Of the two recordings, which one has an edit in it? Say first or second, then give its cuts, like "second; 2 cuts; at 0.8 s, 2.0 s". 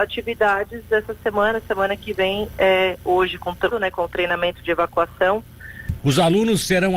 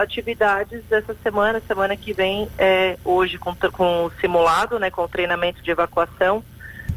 first; 2 cuts; at 3.7 s, 6.0 s